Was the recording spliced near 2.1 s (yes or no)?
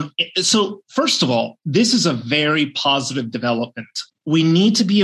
no